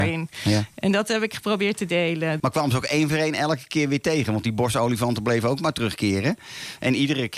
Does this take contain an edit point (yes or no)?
yes